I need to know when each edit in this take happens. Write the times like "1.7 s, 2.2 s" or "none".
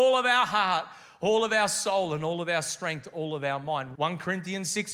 3.9 s